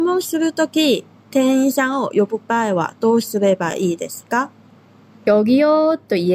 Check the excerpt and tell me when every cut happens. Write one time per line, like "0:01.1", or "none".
none